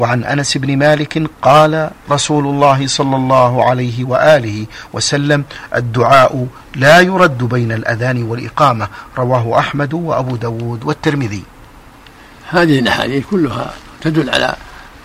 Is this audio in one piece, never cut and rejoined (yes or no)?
no